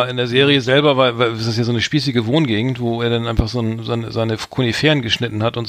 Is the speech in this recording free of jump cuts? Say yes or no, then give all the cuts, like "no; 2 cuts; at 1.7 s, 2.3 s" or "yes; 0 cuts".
yes; 0 cuts